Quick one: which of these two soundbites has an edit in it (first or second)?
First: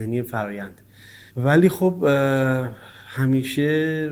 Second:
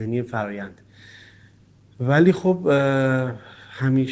first